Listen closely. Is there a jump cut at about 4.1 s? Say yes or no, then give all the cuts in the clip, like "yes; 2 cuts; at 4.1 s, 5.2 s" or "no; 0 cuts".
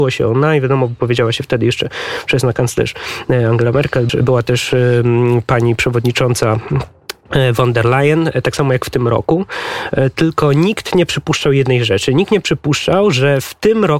yes; 1 cut; at 4.1 s